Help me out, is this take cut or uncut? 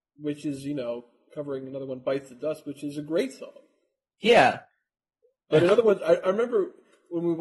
uncut